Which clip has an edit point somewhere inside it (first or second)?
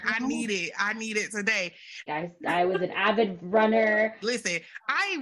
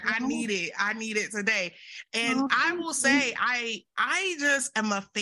first